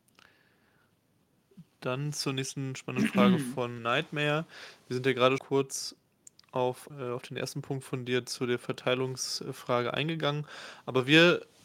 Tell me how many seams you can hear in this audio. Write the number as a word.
three